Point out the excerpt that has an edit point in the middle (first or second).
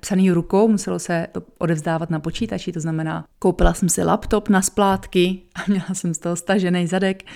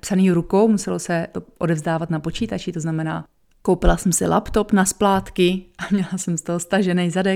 first